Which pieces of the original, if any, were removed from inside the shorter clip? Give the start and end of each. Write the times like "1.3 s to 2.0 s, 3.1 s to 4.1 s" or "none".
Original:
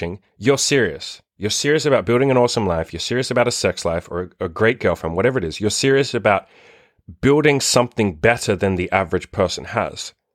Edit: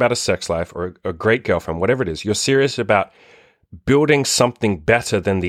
none